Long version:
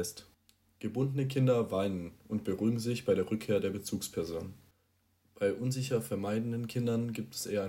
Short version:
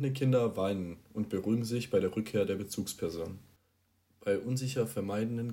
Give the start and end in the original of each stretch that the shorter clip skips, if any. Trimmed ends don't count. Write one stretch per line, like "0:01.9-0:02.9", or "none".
none